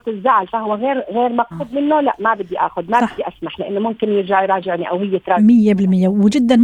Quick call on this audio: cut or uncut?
cut